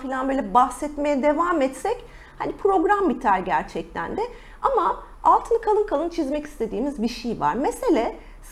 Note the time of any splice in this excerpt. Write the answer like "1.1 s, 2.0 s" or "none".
none